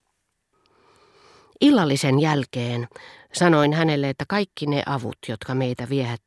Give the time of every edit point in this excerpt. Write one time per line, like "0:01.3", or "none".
0:03.2